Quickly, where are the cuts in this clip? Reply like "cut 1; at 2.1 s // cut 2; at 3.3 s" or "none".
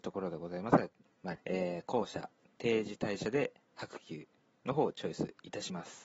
cut 1; at 1.4 s